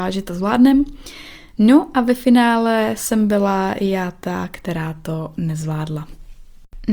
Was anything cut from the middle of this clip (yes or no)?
no